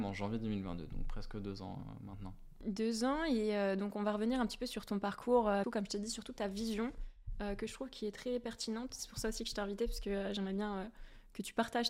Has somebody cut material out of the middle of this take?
yes; 1 cut; at 5.6 s

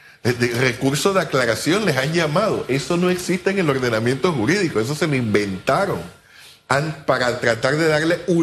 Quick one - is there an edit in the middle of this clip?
no; 0 cuts

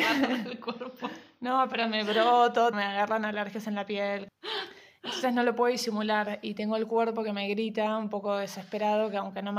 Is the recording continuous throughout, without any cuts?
no; 1 cut; at 2.7 s

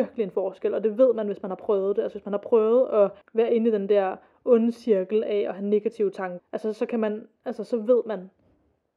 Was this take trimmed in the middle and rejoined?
yes; 2 cuts; at 3.2 s, 6.4 s

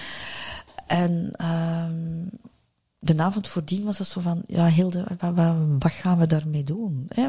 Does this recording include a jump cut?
no; 0 cuts

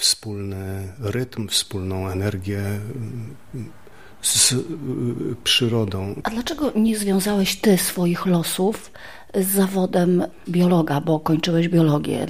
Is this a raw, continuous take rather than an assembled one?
no; 1 cut; at 6.2 s

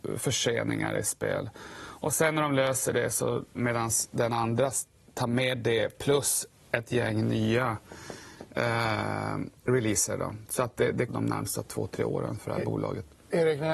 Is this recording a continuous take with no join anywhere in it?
no; 2 cuts; at 3.5 s, 11.1 s

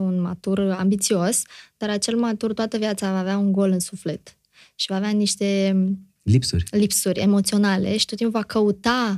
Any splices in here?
no; 0 cuts

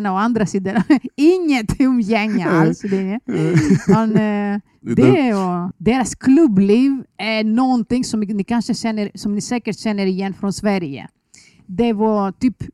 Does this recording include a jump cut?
yes; 1 cut; at 5.7 s

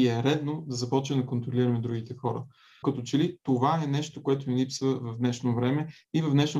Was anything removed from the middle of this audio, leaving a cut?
no; 0 cuts

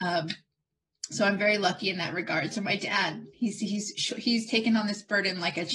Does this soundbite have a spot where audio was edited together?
no; 0 cuts

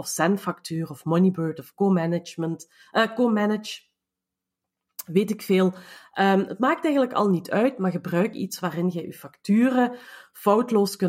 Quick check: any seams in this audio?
no; 0 cuts

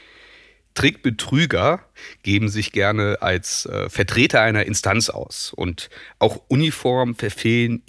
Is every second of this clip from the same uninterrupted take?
yes; 0 cuts

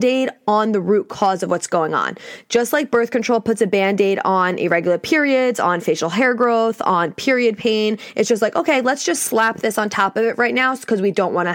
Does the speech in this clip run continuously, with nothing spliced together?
yes; 0 cuts

